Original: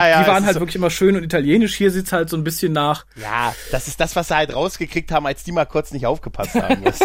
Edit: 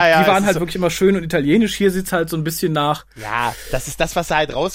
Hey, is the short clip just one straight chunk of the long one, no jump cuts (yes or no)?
yes